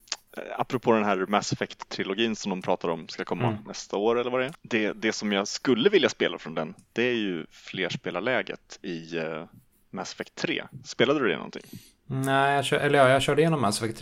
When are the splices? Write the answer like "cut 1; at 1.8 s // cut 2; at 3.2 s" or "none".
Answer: cut 1; at 4.5 s